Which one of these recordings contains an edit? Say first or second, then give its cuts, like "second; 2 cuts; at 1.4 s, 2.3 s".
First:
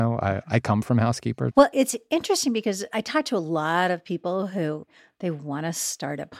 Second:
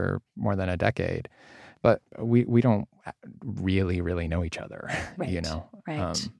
first; 1 cut; at 1.5 s